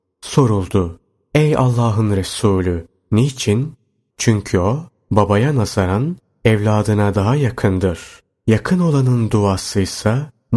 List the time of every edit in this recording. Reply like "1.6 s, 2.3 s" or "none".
4.1 s